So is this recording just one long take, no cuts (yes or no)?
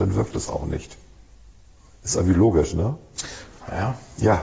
yes